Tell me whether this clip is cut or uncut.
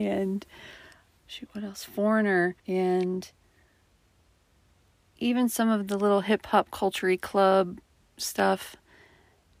cut